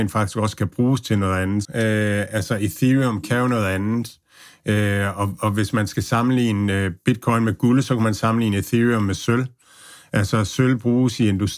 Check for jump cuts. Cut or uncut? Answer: cut